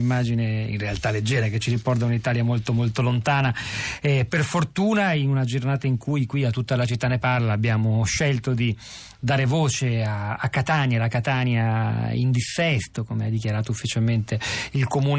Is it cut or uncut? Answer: uncut